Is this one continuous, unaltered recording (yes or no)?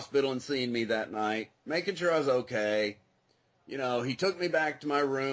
yes